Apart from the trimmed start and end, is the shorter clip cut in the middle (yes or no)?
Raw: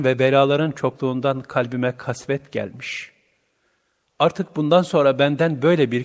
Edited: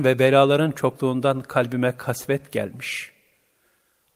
no